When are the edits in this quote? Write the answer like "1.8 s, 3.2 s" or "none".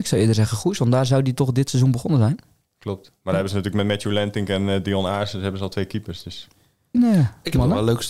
6.9 s